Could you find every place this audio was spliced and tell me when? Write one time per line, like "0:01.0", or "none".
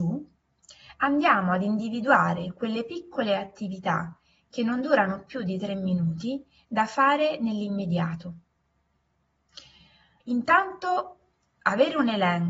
0:10.2